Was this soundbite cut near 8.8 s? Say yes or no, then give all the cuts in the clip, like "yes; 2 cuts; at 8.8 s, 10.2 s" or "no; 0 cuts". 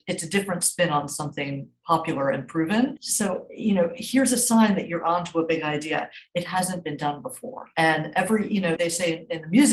yes; 2 cuts; at 3.0 s, 8.8 s